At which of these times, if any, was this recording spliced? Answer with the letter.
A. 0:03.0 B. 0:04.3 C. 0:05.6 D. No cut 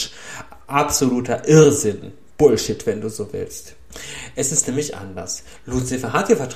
D